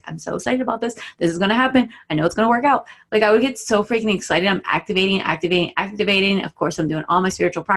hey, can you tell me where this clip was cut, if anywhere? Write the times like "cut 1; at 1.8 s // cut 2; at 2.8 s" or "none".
none